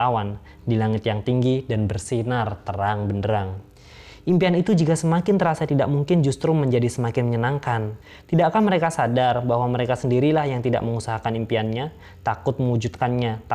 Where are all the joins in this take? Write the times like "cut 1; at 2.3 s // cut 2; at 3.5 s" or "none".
cut 1; at 8.0 s